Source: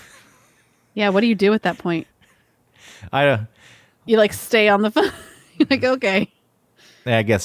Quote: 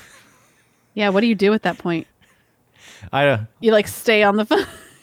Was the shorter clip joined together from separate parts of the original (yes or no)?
yes